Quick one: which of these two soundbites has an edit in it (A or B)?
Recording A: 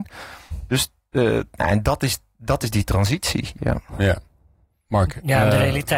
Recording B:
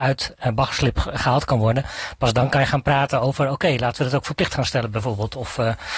A